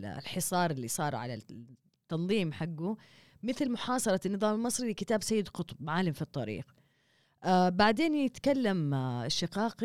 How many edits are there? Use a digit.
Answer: 0